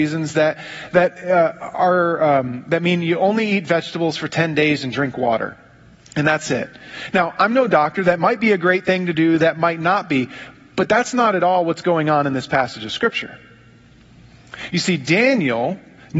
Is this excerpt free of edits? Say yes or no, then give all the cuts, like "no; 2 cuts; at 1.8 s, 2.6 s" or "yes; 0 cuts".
yes; 0 cuts